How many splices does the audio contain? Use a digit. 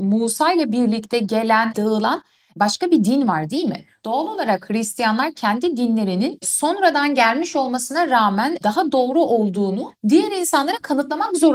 1